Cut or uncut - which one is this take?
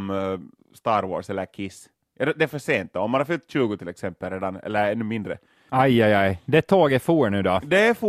cut